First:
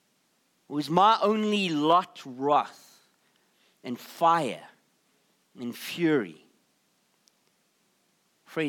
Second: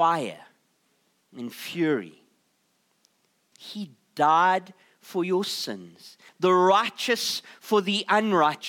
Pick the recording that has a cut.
second; 2 cuts; at 3.5 s, 6.3 s

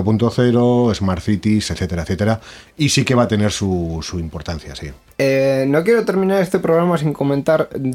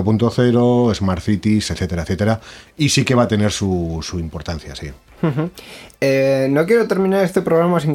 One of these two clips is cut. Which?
first; 1 cut; at 5.1 s

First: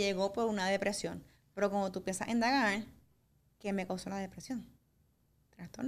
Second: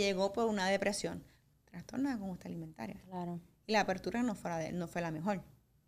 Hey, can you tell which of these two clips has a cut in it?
second; 1 cut; at 1.5 s

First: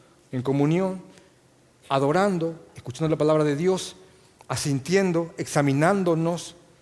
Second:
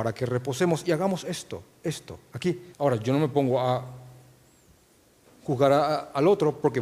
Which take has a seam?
second; 1 cut; at 2.7 s

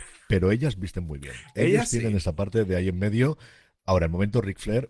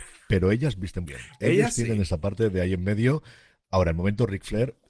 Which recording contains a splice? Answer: second; 1 cut; at 1.1 s

